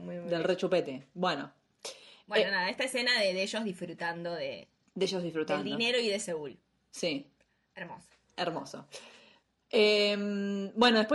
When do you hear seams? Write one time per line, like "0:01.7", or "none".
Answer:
none